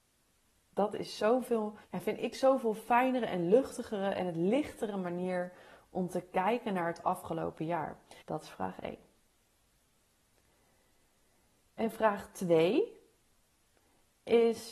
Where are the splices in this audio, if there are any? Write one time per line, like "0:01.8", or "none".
0:01.8
0:08.2